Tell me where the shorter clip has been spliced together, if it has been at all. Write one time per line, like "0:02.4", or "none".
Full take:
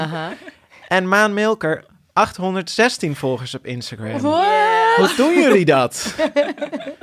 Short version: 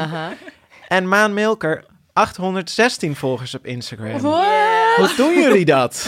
none